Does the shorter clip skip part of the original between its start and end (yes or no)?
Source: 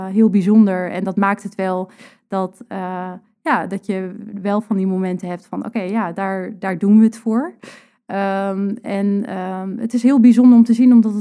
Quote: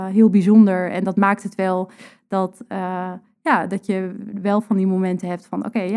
no